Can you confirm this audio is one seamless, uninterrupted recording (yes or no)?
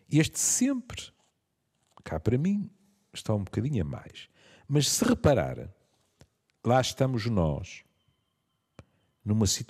yes